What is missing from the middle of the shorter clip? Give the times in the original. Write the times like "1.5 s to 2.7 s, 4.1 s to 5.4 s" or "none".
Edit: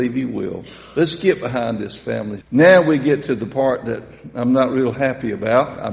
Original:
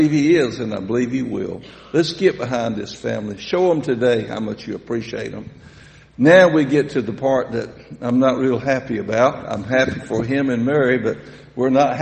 3.4 s to 6.1 s